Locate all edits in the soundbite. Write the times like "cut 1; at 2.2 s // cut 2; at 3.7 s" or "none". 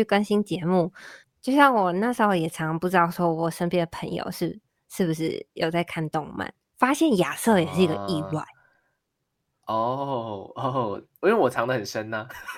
cut 1; at 1.2 s